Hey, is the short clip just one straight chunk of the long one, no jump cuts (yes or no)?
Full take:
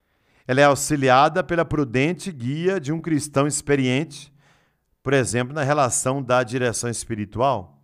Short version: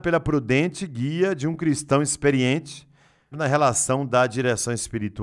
no